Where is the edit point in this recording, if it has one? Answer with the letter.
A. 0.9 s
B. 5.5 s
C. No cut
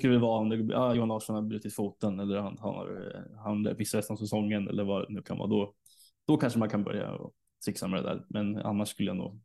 C